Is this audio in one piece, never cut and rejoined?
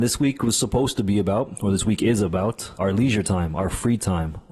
no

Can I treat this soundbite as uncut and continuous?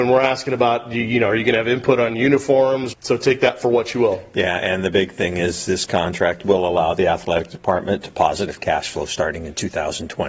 no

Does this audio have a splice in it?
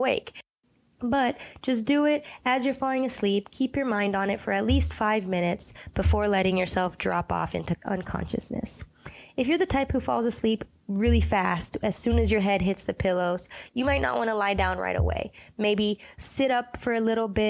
no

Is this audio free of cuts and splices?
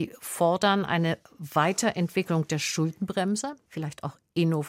no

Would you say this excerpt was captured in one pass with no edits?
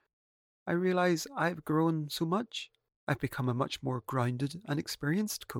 no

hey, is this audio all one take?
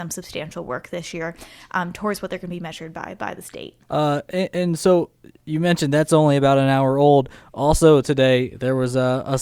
no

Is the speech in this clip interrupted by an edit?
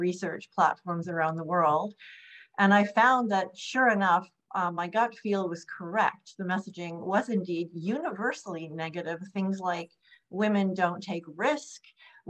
no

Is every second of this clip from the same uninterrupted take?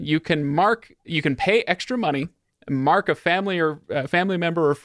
no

